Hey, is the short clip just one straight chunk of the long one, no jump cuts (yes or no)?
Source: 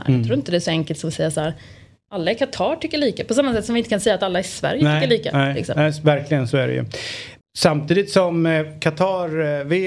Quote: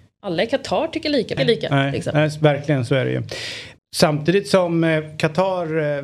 no